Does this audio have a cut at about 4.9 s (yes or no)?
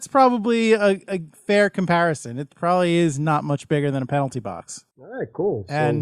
yes